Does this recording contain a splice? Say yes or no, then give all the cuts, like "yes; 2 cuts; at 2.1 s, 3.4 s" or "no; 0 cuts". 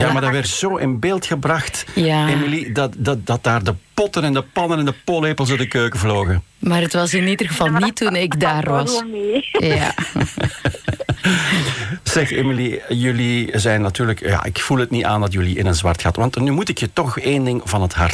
no; 0 cuts